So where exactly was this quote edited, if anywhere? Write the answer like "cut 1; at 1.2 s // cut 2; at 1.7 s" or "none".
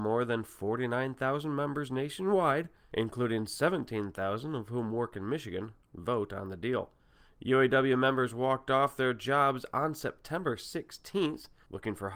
none